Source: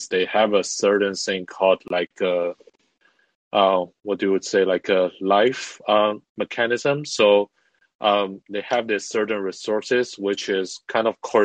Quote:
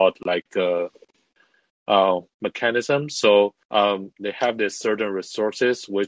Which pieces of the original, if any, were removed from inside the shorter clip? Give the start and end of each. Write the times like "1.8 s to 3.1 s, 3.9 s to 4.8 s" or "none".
3.9 s to 6.3 s, 7.6 s to 7.9 s